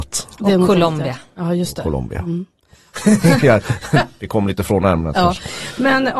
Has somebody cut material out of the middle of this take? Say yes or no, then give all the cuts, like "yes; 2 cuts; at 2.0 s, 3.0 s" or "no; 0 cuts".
yes; 1 cut; at 2.9 s